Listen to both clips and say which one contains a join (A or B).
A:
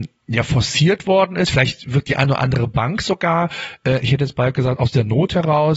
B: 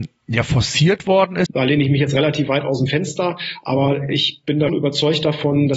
B